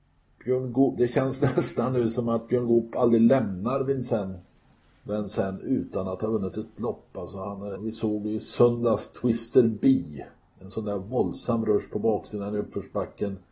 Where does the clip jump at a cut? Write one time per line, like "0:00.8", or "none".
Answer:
0:07.8